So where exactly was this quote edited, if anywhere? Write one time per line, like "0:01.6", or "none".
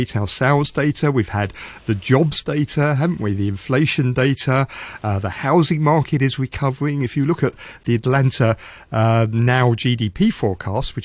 none